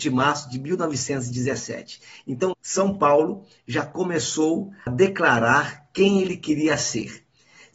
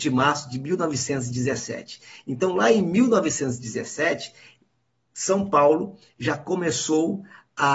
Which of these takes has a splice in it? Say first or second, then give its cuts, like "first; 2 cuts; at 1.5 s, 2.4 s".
first; 2 cuts; at 2.5 s, 4.9 s